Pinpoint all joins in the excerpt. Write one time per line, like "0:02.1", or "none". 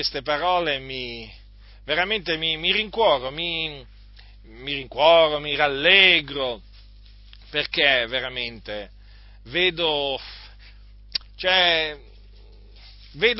none